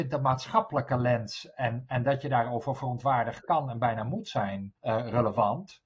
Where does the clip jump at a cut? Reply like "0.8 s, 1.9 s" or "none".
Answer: 4.8 s

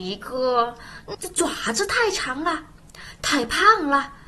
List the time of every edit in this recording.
1.1 s

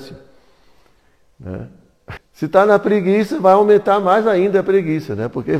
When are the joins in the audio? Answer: 2.2 s

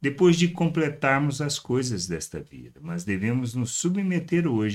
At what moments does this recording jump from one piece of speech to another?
none

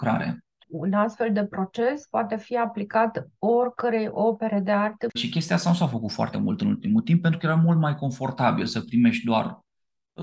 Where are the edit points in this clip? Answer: 5.1 s

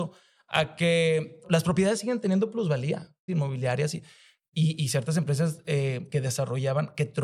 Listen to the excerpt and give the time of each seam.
1.4 s, 3.3 s

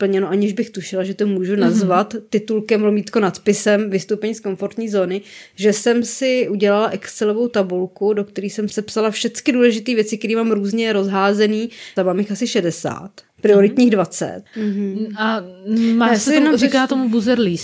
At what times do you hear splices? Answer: 8.7 s, 12.0 s, 14.5 s

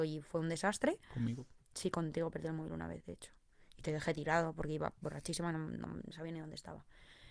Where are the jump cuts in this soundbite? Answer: none

